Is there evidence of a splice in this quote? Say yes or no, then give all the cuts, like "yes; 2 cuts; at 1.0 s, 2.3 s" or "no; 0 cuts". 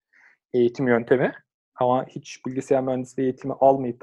no; 0 cuts